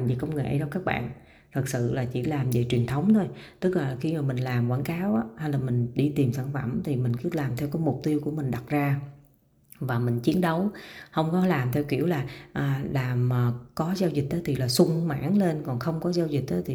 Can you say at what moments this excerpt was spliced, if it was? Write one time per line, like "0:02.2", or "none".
none